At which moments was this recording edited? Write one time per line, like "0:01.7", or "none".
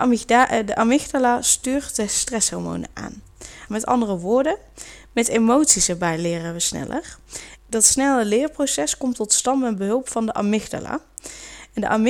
0:03.7
0:07.6